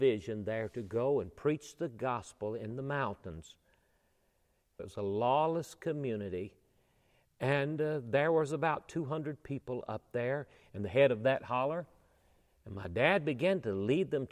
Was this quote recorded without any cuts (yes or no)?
no